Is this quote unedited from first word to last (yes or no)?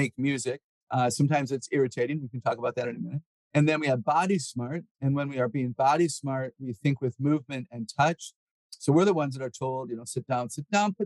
yes